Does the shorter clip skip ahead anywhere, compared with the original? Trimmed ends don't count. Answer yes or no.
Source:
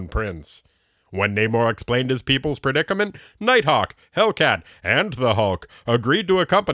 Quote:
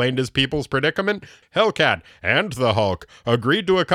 yes